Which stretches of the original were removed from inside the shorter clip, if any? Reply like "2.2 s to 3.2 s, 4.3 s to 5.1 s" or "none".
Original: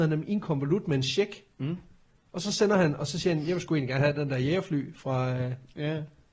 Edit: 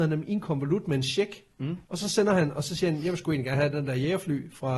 1.8 s to 2.3 s